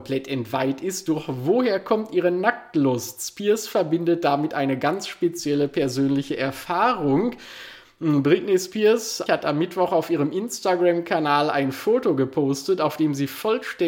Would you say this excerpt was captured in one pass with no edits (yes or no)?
no